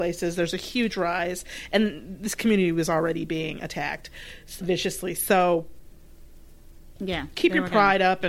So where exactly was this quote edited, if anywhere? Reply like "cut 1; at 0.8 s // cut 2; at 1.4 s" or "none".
cut 1; at 4.6 s